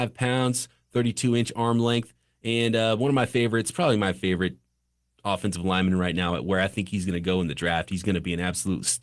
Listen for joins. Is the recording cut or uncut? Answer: uncut